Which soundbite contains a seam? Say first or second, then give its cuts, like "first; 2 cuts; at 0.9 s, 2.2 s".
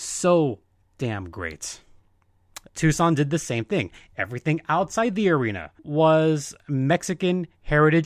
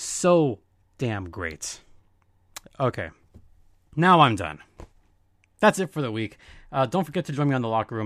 first; 2 cuts; at 2.7 s, 5.8 s